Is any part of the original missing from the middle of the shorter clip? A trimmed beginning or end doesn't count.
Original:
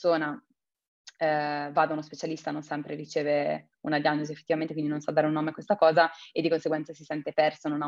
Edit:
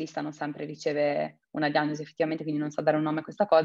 no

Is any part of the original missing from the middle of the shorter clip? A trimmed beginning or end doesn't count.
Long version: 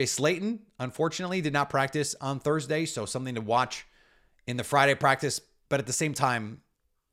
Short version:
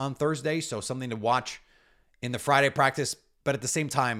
no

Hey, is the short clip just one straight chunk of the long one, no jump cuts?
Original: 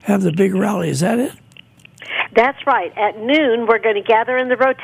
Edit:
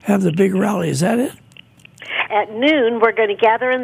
no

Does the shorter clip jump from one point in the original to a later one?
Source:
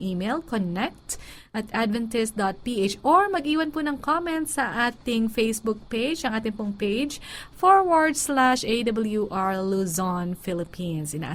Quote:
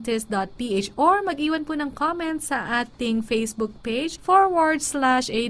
yes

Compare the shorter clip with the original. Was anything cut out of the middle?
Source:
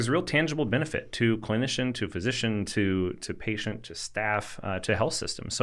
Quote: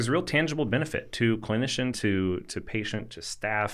yes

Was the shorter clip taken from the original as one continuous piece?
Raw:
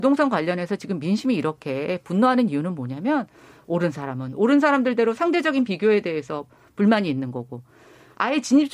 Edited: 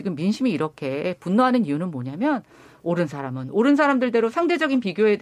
yes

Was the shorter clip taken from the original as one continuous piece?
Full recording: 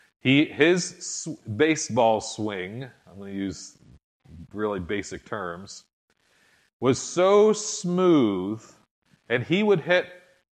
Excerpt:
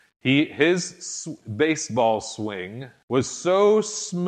no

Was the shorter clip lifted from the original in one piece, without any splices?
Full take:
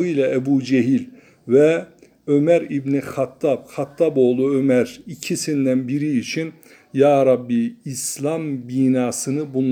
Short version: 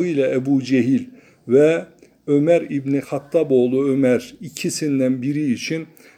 no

